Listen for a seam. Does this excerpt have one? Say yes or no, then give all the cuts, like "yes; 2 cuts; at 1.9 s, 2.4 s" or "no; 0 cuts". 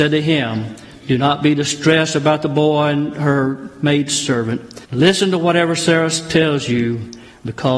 yes; 1 cut; at 4.8 s